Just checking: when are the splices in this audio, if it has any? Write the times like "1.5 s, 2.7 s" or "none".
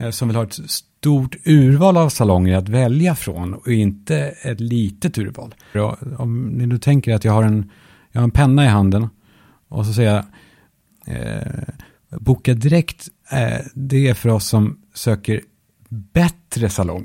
5.7 s